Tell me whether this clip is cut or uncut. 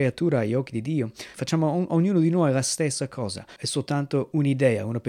cut